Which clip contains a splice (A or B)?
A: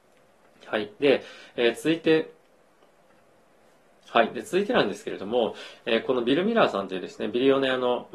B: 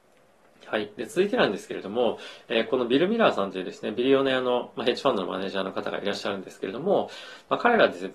B